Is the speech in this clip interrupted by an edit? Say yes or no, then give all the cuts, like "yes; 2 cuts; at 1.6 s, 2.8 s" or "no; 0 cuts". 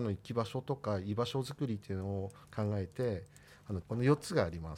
yes; 1 cut; at 3.8 s